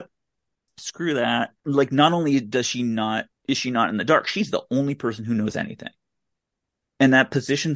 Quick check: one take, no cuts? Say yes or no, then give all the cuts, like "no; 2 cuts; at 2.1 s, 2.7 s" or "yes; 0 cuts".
yes; 0 cuts